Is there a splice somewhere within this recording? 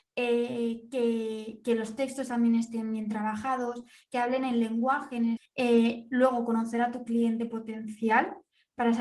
yes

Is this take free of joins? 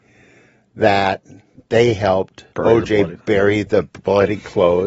no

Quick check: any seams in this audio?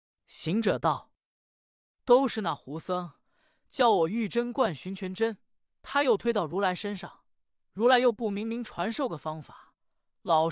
no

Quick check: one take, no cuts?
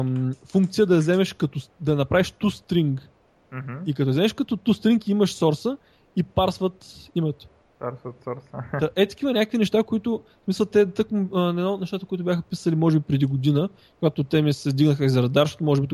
yes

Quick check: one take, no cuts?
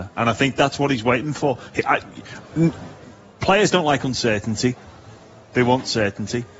yes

